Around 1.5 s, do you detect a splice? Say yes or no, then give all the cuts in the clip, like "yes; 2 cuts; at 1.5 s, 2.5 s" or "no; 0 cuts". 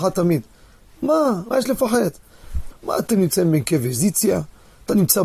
yes; 2 cuts; at 1.5 s, 2.7 s